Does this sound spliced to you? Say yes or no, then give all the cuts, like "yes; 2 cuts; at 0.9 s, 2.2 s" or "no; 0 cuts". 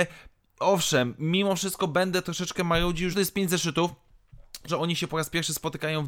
yes; 2 cuts; at 3.1 s, 4.7 s